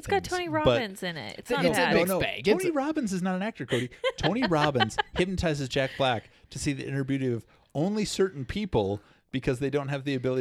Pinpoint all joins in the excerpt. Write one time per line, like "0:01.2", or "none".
none